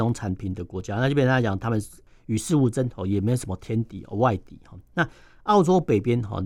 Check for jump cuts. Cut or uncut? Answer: uncut